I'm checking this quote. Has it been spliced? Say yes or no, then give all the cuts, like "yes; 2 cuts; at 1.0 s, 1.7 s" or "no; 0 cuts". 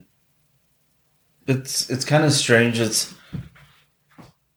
no; 0 cuts